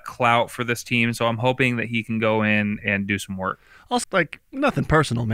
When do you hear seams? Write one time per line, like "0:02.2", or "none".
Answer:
0:02.8
0:04.0